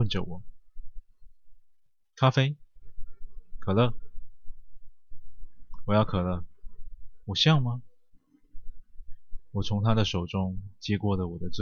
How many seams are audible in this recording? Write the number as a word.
two